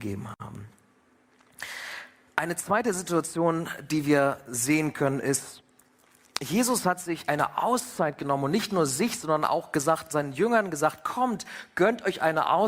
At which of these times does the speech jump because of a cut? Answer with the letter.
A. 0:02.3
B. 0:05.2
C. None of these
C